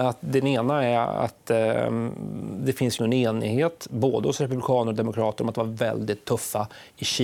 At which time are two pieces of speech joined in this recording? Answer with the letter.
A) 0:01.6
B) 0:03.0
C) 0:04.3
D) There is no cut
B